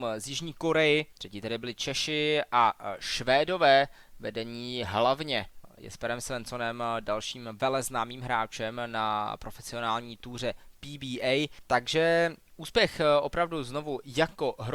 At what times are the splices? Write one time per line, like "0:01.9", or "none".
0:01.1